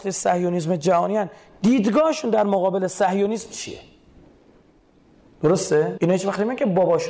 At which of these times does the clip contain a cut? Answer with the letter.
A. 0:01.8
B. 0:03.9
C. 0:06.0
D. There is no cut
C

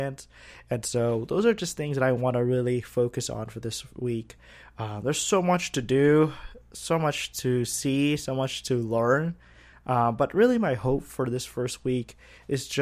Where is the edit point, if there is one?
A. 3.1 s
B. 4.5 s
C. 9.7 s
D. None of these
D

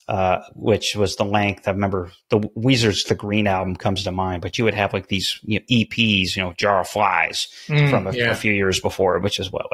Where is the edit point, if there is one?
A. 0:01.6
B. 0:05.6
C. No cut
C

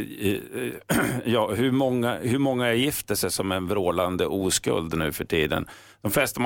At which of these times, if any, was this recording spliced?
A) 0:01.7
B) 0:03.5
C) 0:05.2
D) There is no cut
D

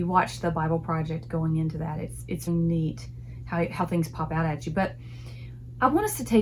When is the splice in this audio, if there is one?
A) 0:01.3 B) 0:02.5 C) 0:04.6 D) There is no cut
B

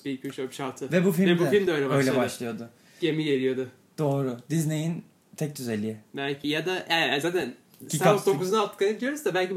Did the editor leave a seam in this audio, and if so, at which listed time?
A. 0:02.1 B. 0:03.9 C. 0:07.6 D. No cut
D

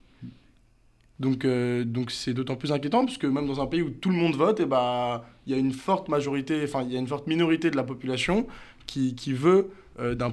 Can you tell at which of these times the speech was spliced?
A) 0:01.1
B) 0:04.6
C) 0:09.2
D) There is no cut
A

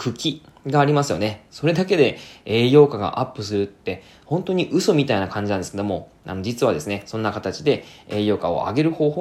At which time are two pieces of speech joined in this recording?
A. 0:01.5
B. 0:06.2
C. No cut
A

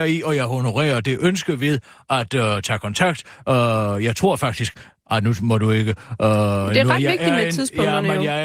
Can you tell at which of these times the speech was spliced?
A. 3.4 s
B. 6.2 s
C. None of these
C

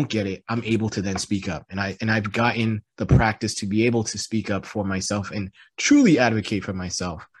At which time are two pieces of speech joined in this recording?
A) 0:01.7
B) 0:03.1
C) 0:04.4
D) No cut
D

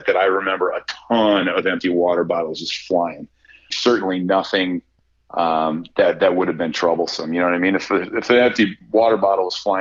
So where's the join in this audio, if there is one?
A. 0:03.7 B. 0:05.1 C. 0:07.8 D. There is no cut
A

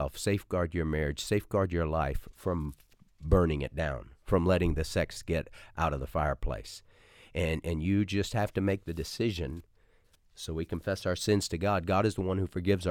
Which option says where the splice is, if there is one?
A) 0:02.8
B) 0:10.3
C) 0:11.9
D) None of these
B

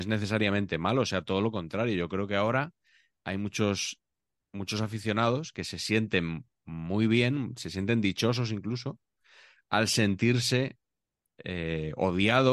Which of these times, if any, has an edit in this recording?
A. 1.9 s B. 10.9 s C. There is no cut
C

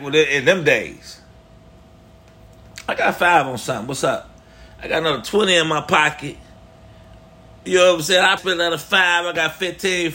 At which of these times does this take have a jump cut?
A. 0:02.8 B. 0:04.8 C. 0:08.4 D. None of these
C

